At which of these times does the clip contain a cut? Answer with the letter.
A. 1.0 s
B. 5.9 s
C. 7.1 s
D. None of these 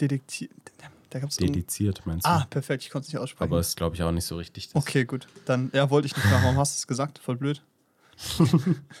D